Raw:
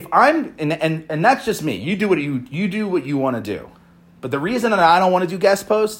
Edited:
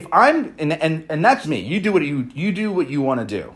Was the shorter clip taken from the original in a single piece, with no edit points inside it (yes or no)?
no